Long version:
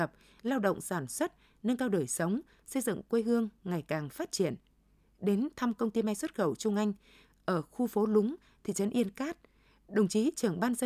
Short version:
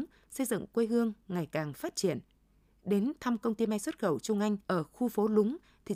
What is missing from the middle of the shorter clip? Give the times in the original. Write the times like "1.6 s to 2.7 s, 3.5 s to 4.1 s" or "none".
7.0 s to 7.4 s